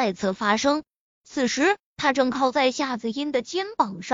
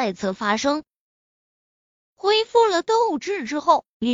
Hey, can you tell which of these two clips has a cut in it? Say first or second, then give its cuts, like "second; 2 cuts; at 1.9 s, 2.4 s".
first; 1 cut; at 1.1 s